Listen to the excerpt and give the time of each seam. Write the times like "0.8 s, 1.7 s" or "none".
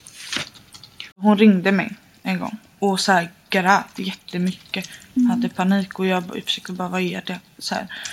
1.1 s